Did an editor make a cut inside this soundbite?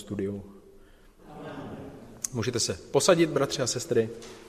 yes; 1 cut; at 1.2 s

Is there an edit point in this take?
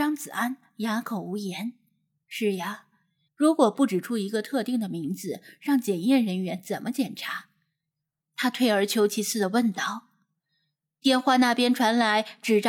yes; 2 cuts; at 3.3 s, 8.2 s

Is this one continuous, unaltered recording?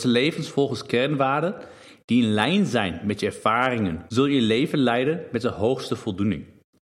no; 1 cut; at 4.1 s

